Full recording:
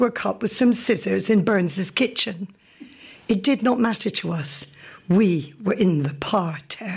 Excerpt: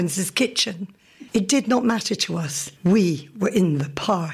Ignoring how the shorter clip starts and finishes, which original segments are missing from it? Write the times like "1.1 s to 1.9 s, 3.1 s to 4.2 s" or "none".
2.9 s to 3.2 s, 4.7 s to 5.0 s

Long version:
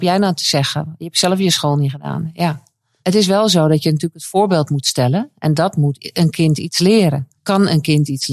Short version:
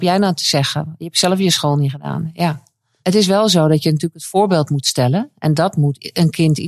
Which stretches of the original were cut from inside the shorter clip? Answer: none

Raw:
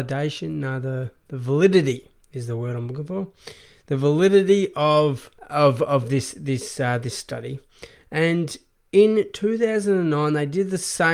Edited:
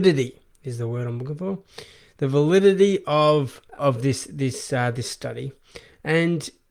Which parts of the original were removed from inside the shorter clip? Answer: 5.5 s to 5.9 s

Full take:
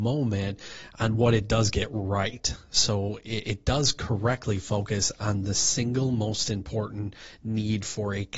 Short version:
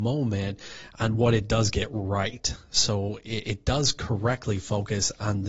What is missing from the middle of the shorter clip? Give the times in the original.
none

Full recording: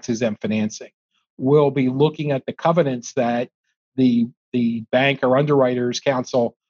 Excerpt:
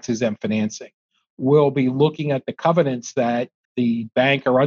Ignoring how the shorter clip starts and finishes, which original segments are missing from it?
3.7 s to 4.4 s

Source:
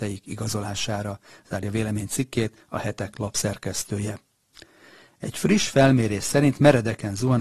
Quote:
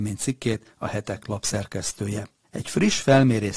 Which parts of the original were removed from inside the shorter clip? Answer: 4.3 s to 5.1 s

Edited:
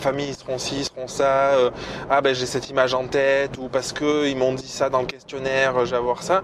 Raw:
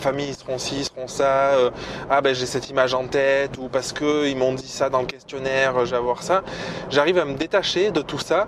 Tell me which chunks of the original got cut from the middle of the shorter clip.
none

